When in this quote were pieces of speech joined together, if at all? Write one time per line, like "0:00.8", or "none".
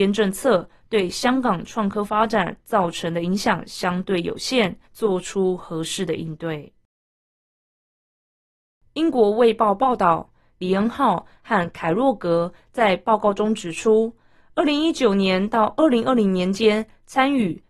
0:04.9
0:10.6